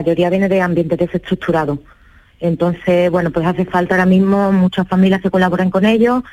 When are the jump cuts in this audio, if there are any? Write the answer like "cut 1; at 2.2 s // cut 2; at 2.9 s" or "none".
none